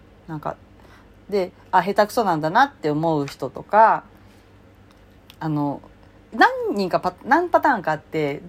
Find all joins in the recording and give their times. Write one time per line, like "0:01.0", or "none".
0:06.2